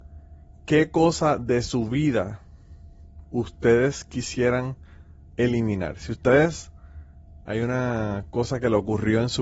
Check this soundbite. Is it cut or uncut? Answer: uncut